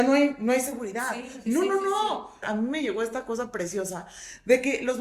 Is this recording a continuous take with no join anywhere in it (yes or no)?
no